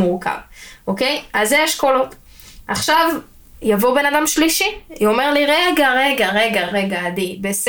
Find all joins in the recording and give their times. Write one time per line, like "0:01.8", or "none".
0:06.7